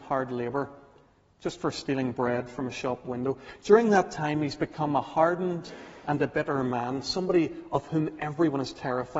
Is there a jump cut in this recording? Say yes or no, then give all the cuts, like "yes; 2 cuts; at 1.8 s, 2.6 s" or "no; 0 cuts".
no; 0 cuts